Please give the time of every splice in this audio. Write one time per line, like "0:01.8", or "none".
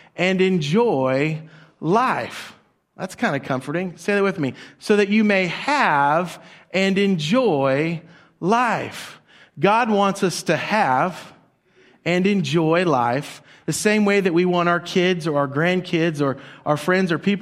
none